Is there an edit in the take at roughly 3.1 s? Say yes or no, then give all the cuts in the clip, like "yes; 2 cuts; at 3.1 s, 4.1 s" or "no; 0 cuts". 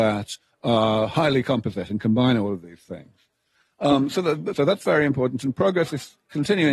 no; 1 cut; at 4.5 s